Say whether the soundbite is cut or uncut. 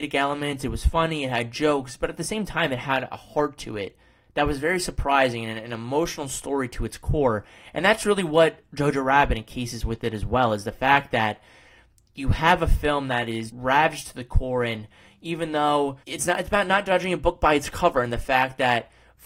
cut